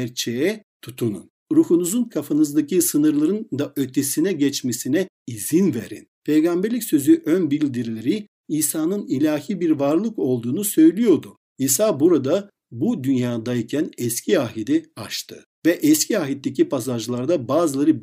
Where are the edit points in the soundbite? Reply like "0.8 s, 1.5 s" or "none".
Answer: 6.1 s, 11.5 s

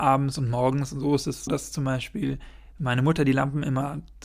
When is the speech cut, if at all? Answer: 1.5 s

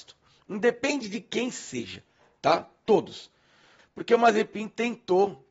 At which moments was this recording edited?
3.8 s

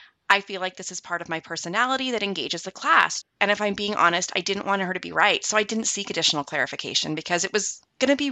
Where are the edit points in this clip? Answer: 3.2 s

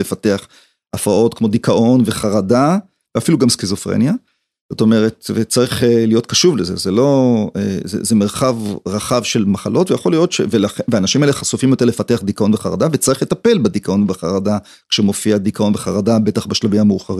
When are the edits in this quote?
none

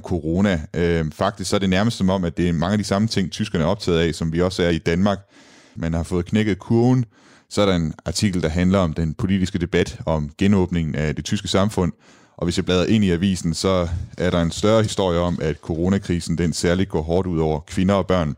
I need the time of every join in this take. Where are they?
5.8 s

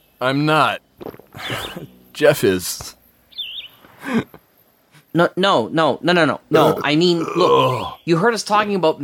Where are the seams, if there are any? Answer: none

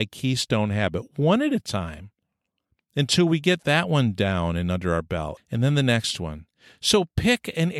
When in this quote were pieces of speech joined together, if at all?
5.4 s

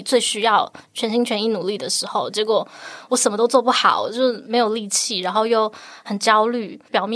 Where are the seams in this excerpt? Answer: none

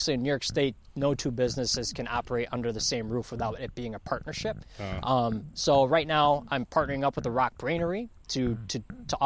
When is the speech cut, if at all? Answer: none

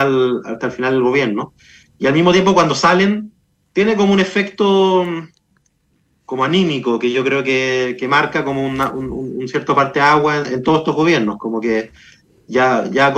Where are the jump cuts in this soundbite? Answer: none

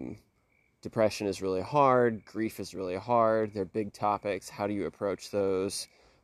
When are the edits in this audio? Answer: none

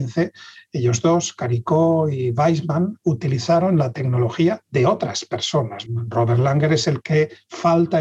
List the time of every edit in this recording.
5.9 s

